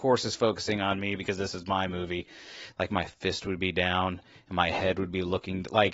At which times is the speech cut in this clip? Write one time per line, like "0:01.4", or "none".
0:02.7